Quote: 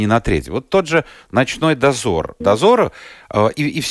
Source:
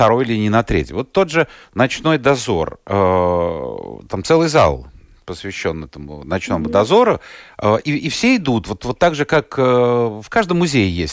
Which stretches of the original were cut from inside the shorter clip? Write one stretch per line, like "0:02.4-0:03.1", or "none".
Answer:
0:02.8-0:06.7